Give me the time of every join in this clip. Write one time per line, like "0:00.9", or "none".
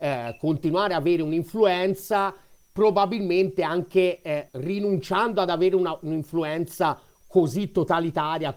0:04.5